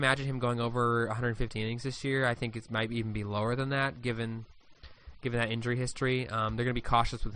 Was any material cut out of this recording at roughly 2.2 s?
no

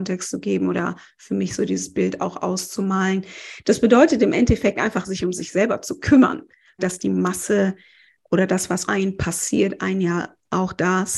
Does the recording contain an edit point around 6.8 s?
yes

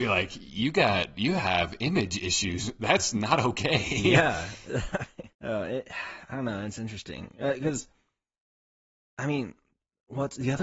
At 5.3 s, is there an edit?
yes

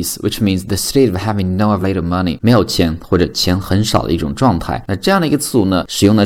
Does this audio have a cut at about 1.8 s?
yes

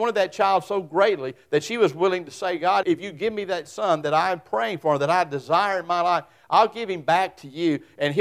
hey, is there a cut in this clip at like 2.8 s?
yes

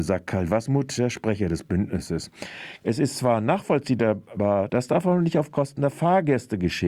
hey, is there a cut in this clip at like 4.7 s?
yes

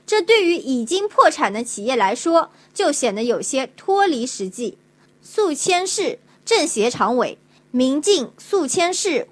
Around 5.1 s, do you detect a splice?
yes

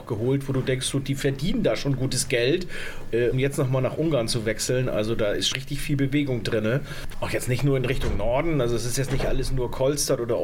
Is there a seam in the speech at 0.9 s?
no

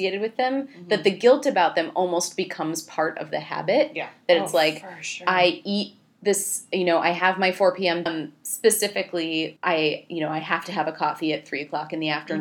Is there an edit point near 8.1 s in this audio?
yes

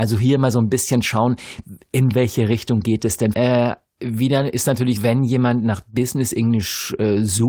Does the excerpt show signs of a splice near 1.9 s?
no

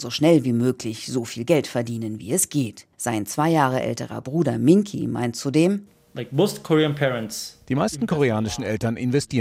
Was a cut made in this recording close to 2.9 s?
yes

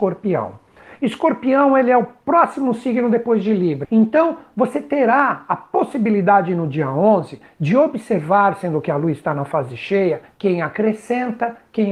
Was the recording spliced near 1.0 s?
no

